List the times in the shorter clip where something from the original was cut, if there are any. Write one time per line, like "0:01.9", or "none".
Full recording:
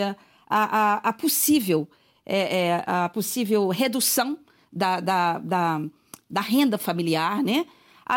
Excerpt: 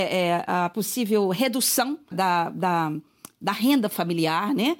0:02.1